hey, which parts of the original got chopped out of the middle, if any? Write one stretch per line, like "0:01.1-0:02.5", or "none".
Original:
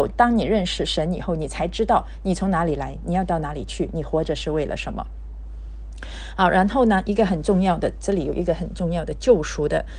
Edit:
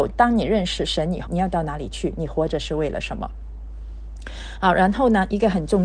0:01.3-0:03.0